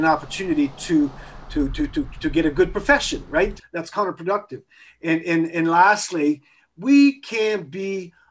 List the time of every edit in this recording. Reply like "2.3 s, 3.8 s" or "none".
3.6 s